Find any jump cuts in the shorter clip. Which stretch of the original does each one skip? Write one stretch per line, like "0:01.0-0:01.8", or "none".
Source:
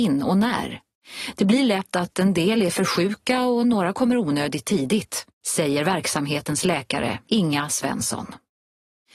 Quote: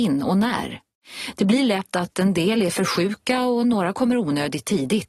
none